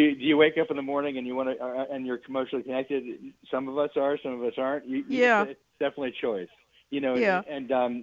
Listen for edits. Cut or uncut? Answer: uncut